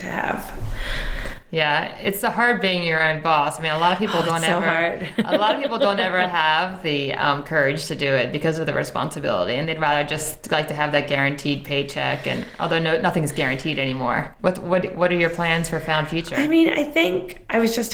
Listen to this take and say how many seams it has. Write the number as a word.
one